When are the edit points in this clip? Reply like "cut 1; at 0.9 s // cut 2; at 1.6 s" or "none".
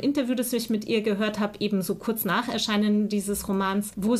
none